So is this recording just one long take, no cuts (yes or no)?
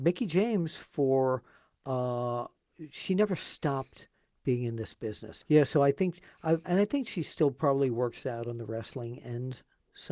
no